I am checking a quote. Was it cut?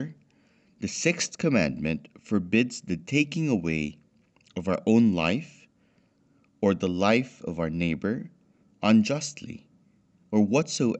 no; 0 cuts

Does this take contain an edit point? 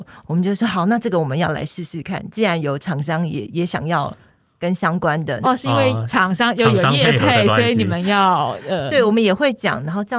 yes; 2 cuts; at 5.4 s, 8.9 s

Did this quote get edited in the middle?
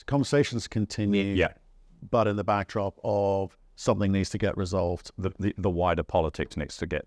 no; 0 cuts

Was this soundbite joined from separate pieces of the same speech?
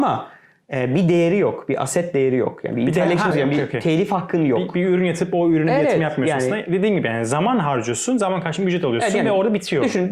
yes; 1 cut; at 3.3 s

